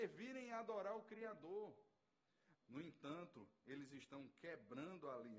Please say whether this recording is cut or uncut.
cut